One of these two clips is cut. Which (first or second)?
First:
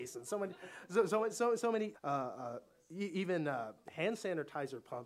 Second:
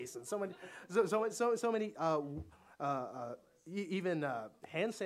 first